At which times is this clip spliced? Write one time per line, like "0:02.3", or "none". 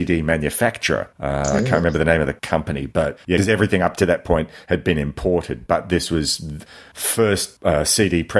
none

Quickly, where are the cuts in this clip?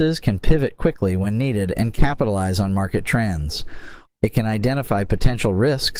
0:04.1

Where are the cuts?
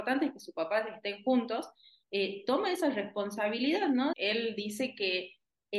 0:04.1

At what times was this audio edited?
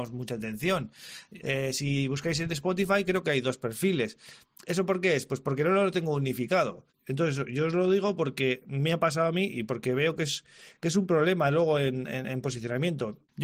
0:01.4

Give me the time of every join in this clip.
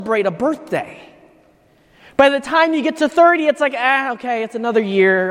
none

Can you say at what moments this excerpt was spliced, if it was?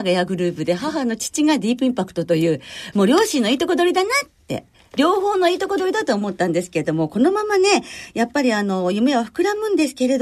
0:02.9

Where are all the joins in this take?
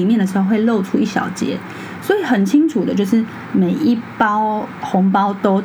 none

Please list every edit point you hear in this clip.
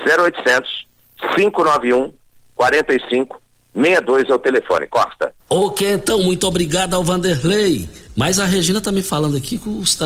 0:05.4
0:08.1

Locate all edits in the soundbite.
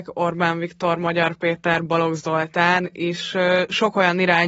none

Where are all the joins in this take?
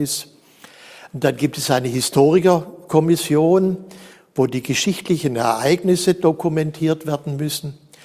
none

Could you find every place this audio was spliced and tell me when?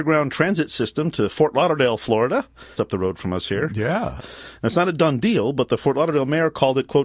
0:02.7
0:04.2

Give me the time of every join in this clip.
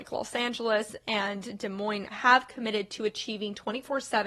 0:02.1

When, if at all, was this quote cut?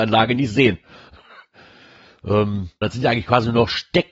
0:02.8

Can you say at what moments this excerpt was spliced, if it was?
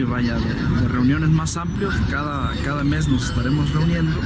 none

